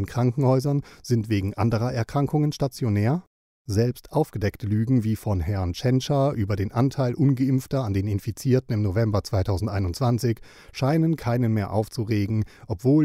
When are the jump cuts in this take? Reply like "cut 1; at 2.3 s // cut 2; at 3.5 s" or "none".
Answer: cut 1; at 3.5 s